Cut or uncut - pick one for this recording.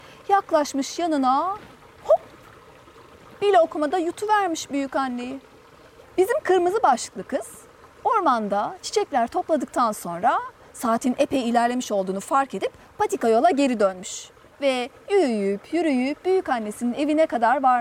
cut